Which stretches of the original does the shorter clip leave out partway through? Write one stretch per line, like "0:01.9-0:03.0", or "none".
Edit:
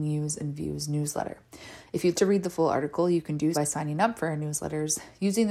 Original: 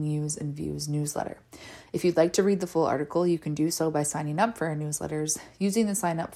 0:02.1-0:02.3
0:03.7-0:03.9